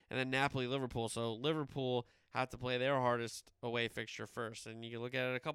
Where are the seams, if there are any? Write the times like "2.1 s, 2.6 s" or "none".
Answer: none